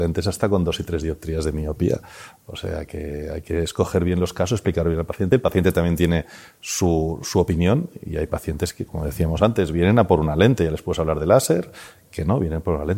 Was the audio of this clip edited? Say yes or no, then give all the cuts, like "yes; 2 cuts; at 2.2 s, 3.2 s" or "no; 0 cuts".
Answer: no; 0 cuts